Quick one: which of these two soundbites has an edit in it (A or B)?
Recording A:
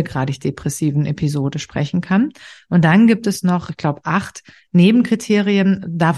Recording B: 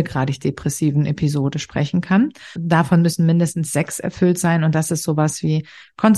B